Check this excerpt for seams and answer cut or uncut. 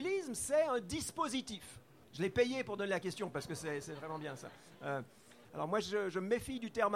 cut